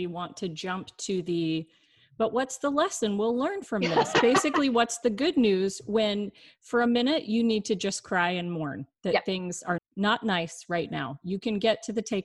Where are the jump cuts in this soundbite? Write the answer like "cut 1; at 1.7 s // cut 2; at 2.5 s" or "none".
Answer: cut 1; at 9.8 s